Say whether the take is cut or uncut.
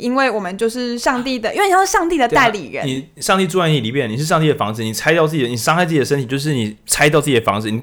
uncut